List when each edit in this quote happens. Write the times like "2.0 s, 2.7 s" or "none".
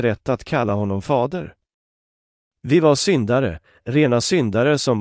none